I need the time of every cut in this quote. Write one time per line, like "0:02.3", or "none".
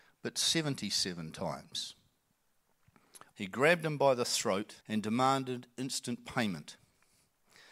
0:03.3
0:04.8